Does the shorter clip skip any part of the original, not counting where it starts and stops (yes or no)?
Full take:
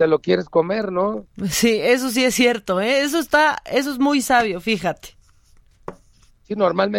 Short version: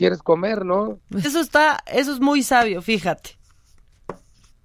yes